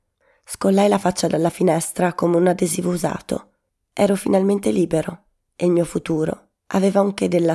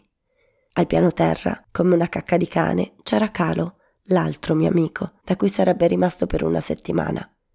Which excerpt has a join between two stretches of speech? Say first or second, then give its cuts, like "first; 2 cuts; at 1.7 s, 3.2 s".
second; 1 cut; at 5.2 s